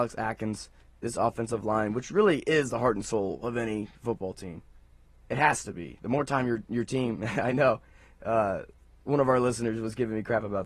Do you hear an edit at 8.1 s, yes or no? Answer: no